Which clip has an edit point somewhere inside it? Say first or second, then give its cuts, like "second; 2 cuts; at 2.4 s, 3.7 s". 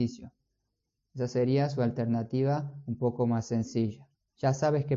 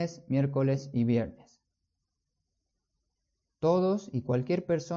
first; 1 cut; at 1.0 s